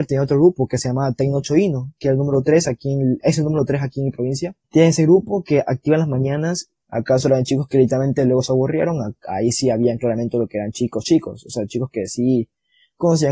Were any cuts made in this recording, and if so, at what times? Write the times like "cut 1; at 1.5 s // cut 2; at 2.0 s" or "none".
cut 1; at 3.2 s // cut 2; at 4.6 s // cut 3; at 6.8 s